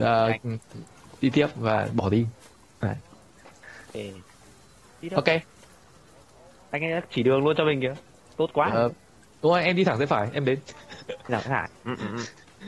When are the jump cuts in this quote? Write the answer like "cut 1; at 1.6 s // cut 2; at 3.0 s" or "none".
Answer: none